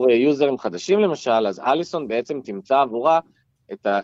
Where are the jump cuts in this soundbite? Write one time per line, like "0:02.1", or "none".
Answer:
none